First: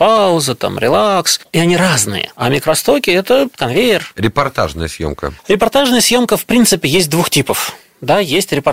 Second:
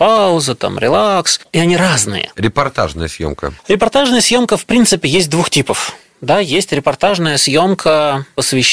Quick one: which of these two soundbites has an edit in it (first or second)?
second